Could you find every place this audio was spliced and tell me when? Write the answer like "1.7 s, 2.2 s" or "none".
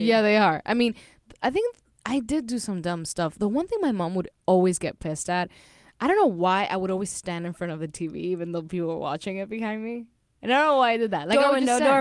none